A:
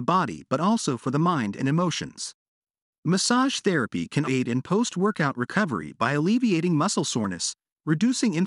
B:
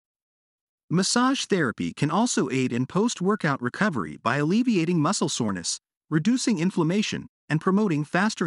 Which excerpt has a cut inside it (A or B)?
A